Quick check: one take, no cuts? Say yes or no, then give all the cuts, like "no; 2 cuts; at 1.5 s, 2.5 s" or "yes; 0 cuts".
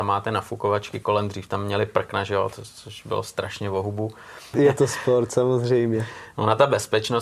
no; 1 cut; at 4.5 s